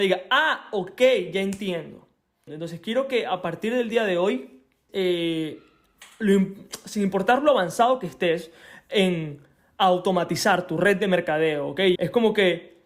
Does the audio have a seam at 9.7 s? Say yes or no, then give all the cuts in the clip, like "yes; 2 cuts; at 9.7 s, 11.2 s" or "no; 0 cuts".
no; 3 cuts; at 2.5 s, 4.9 s, 12.0 s